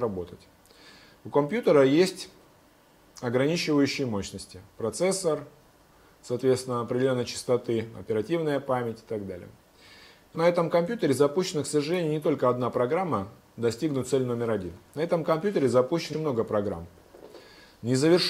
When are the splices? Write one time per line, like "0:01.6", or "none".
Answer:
0:10.3
0:16.1